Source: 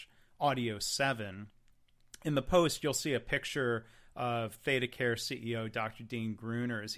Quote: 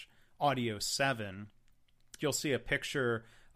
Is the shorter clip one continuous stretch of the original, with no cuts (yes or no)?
no